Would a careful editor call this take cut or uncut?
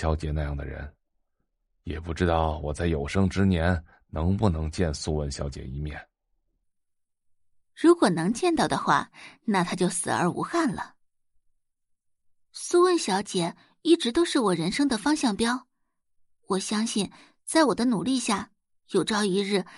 uncut